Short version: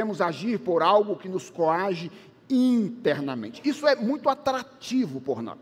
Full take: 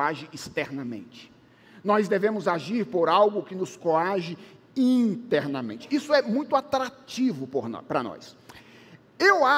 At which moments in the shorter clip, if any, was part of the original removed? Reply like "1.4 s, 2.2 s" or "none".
none